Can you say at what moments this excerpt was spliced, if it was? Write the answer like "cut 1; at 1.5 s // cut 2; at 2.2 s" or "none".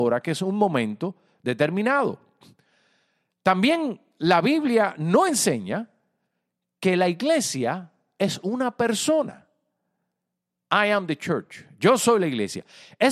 none